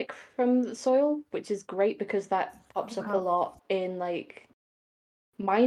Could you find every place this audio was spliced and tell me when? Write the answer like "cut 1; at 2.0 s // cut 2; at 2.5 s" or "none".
none